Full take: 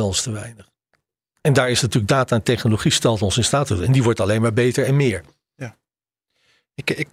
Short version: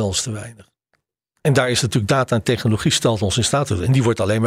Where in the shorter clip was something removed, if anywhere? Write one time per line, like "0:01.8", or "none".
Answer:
none